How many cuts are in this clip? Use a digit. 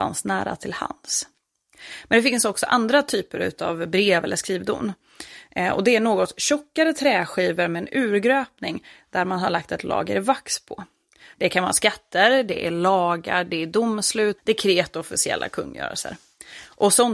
2